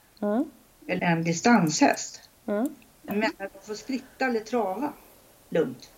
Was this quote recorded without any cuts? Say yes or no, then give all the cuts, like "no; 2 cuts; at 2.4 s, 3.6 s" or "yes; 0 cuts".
no; 2 cuts; at 1.0 s, 3.1 s